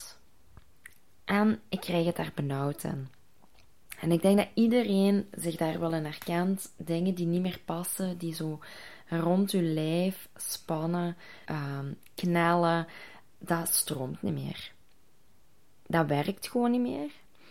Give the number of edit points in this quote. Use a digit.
1